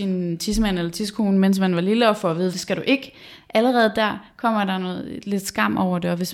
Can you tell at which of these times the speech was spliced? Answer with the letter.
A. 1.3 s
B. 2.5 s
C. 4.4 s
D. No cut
B